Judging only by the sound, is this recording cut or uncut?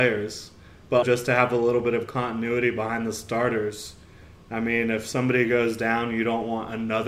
cut